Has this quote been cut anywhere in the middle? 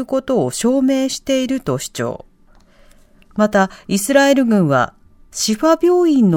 yes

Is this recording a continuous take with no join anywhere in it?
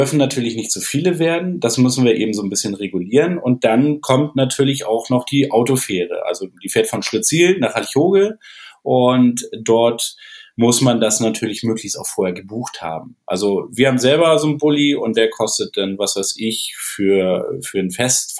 yes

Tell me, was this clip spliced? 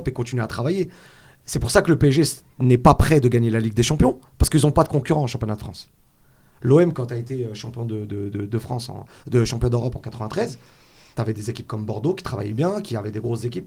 no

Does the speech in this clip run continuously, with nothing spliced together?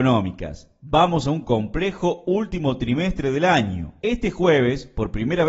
no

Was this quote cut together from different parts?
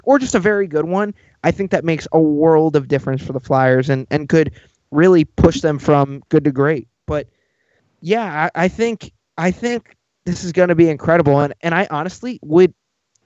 no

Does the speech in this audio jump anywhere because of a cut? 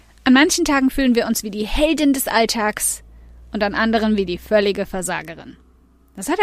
no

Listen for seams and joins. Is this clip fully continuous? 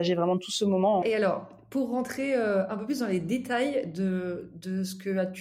no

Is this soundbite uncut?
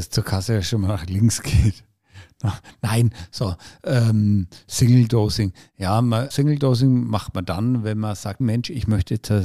no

